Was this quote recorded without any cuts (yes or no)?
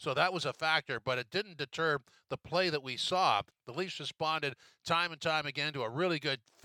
no